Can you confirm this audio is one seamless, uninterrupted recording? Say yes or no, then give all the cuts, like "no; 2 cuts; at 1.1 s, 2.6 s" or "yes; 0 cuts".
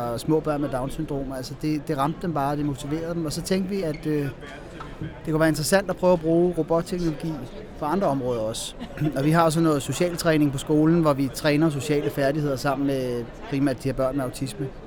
yes; 0 cuts